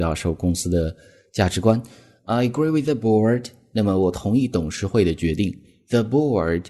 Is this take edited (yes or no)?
no